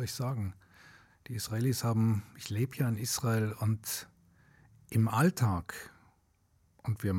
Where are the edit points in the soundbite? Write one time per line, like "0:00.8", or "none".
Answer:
none